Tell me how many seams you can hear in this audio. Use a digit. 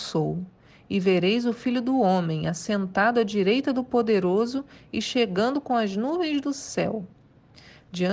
0